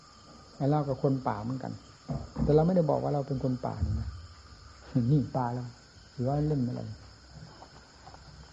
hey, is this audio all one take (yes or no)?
yes